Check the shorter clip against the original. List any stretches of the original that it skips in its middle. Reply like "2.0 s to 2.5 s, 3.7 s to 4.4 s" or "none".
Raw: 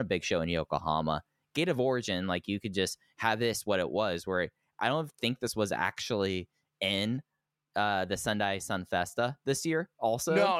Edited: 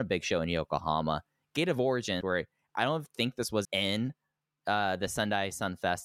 2.2 s to 4.2 s, 5.7 s to 6.7 s